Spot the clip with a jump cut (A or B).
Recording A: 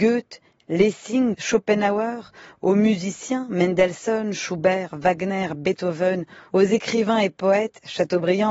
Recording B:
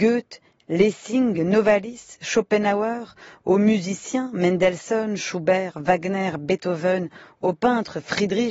A